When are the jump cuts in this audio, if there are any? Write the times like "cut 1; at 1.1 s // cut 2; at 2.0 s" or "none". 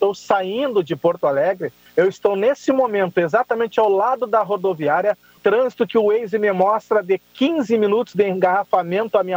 cut 1; at 1.9 s // cut 2; at 5.4 s